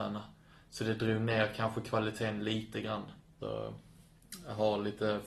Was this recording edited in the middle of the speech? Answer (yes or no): yes